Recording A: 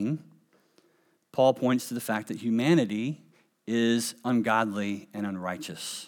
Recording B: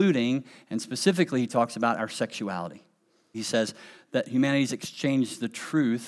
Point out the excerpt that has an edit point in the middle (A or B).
B